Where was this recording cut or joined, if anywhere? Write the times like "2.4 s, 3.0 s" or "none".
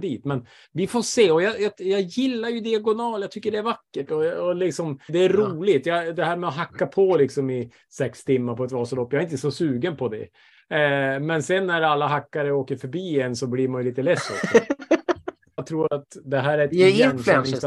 5.1 s, 15.6 s